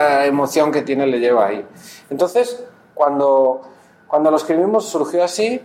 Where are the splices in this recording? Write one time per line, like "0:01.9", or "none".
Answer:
none